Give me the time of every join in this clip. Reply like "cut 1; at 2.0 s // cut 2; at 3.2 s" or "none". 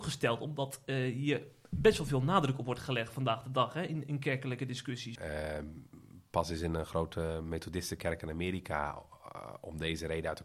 cut 1; at 5.2 s